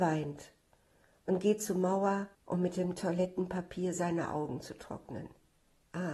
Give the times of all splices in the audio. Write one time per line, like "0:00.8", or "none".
0:02.3